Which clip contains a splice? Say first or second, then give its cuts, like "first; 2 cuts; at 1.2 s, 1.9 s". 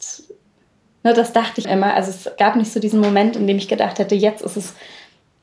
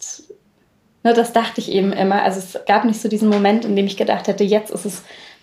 first; 1 cut; at 1.6 s